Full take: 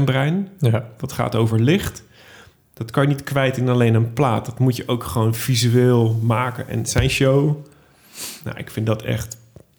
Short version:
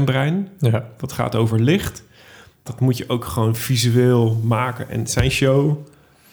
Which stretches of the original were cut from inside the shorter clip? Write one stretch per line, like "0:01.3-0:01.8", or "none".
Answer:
0:02.7-0:04.4